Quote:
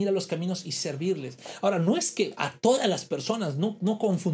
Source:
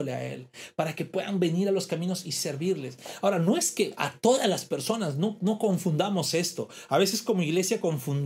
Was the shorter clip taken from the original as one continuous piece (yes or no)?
yes